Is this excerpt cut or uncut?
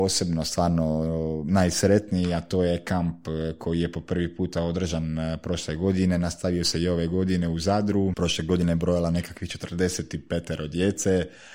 cut